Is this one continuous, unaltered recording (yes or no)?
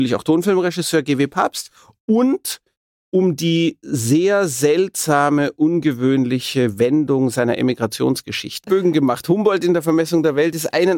no